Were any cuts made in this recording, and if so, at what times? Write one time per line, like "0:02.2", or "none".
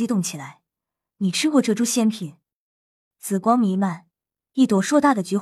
0:01.1
0:03.1